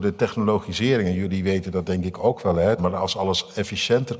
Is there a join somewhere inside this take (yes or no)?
yes